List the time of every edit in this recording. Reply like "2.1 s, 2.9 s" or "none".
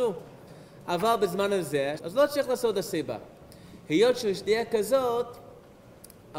2.0 s